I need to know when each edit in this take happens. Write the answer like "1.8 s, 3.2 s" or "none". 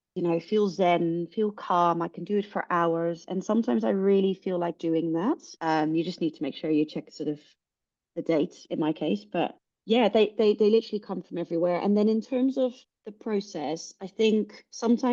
5.6 s